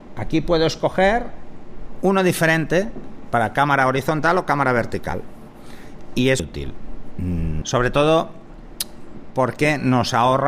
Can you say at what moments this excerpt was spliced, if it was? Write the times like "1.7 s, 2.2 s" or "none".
6.4 s, 7.6 s